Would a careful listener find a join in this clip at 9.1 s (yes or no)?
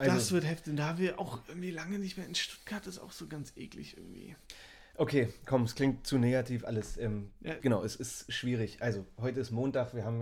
no